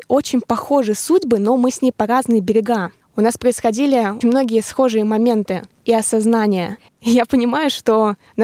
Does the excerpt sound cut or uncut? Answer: cut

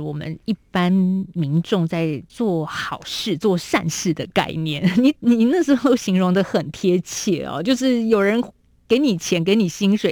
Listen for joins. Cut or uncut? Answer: uncut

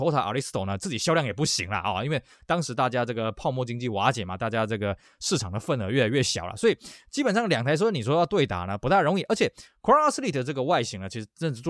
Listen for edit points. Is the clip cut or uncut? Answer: uncut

